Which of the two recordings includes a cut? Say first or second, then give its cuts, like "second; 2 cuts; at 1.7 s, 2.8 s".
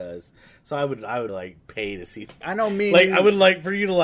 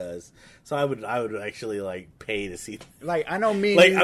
first; 2 cuts; at 1.3 s, 2.4 s